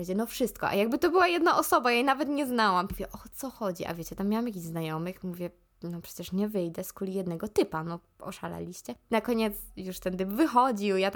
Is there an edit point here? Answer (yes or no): yes